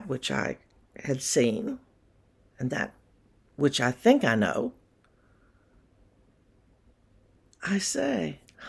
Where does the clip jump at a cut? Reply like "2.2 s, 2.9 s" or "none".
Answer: none